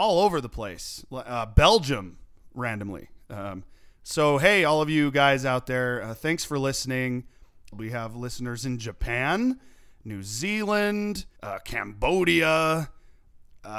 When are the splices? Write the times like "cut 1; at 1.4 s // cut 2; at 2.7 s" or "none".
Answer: cut 1; at 7.7 s // cut 2; at 11.4 s